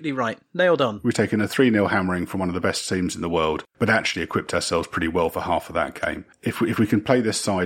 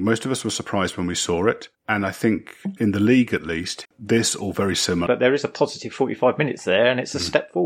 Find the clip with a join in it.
second; 3 cuts; at 2.8 s, 3.8 s, 5.1 s

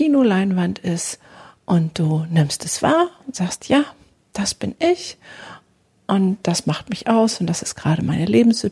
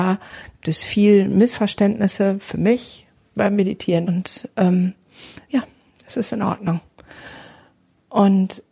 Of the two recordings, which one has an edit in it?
second; 2 cuts; at 4.0 s, 5.5 s

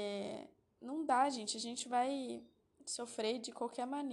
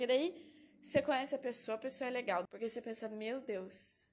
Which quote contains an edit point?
second; 1 cut; at 2.5 s

